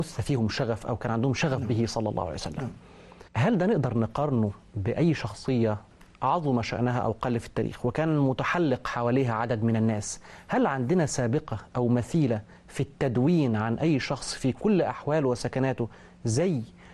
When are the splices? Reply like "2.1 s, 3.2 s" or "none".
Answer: 3.3 s

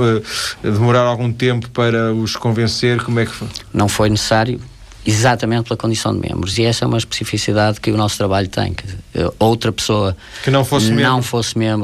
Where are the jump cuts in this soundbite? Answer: none

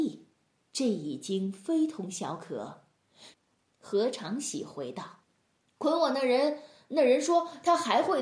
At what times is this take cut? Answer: 3.3 s, 5.2 s

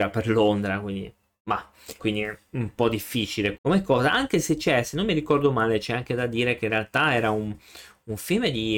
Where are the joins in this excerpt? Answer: 2.0 s, 3.5 s

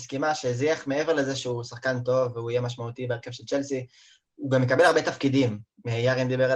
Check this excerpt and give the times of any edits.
none

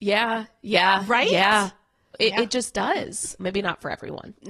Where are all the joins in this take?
2.1 s, 3.4 s

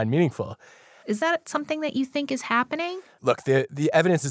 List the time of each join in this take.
1.0 s, 3.2 s

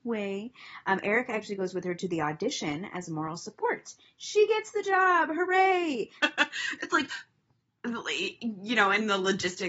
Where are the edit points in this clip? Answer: 6.2 s

